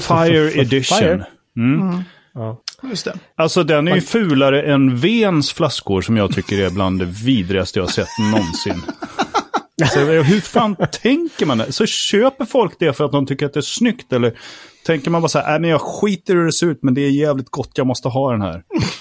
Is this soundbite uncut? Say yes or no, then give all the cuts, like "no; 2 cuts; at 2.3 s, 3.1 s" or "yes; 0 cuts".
yes; 0 cuts